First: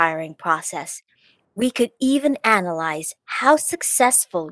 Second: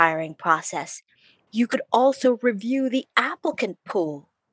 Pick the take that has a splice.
second; 1 cut; at 1.5 s

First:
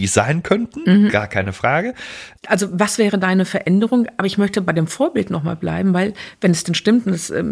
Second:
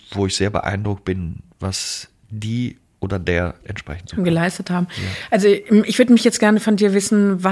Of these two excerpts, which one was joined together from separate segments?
first; 1 cut; at 2.4 s

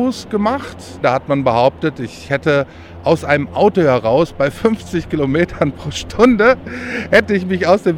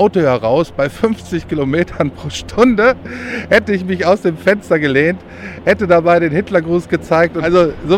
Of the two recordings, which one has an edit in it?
first; 1 cut; at 1.0 s

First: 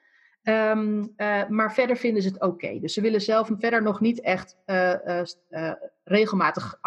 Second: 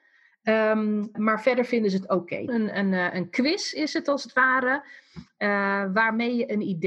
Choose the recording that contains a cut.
second; 2 cuts; at 1.1 s, 2.5 s

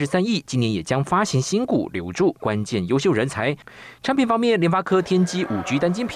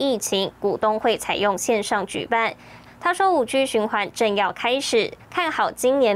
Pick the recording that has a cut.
second; 2 cuts; at 2.9 s, 5.2 s

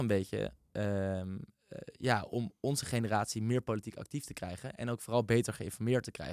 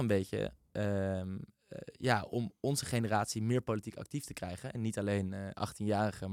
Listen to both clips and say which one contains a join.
second; 1 cut; at 4.7 s

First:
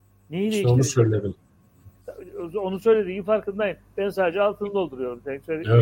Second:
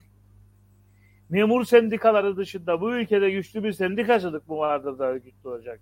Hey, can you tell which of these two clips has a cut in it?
first; 1 cut; at 2.0 s

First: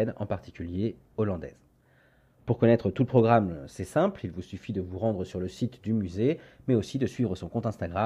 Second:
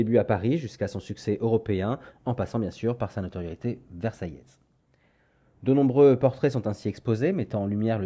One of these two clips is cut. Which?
first; 1 cut; at 2.4 s

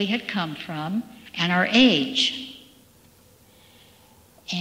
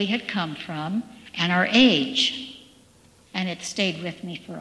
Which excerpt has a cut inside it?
second; 1 cut; at 3.3 s

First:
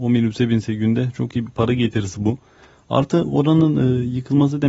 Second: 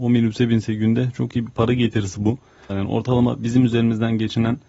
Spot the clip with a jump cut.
second; 1 cut; at 2.7 s

